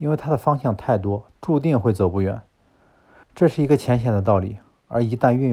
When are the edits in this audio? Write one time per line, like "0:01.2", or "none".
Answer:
0:01.4
0:03.2